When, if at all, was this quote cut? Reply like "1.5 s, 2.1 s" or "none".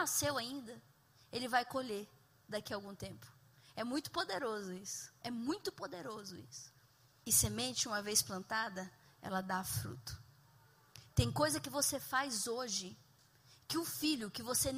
7.2 s